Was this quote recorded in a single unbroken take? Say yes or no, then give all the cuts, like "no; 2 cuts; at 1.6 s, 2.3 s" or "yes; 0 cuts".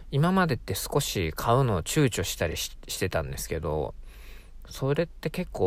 yes; 0 cuts